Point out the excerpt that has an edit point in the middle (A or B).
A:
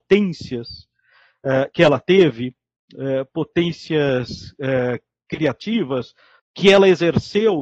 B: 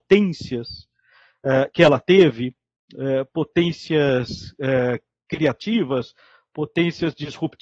A